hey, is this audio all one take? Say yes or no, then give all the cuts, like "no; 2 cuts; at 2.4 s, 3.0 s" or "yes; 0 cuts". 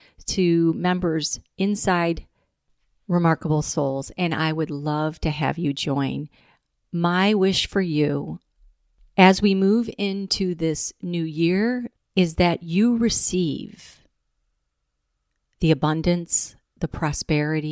no; 1 cut; at 12.0 s